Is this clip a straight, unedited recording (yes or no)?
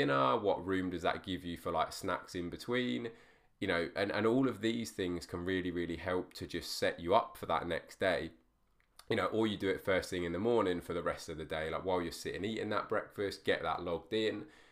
yes